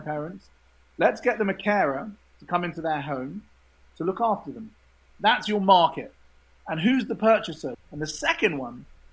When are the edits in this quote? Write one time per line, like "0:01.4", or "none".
0:07.7